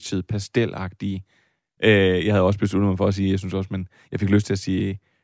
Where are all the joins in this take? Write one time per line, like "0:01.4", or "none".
0:01.8

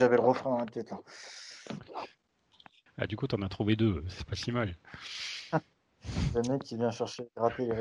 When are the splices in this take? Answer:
0:02.9

